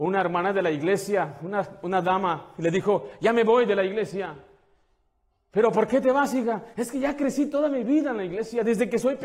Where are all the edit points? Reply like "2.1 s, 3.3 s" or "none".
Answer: none